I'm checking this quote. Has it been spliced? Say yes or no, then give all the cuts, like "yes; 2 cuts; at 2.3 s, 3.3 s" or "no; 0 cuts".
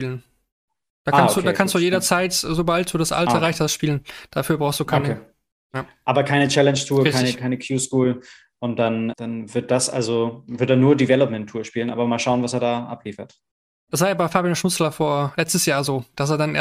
yes; 1 cut; at 9.1 s